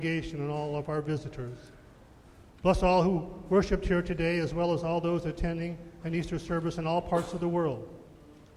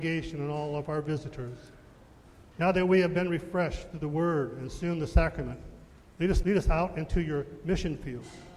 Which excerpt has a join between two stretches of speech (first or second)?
second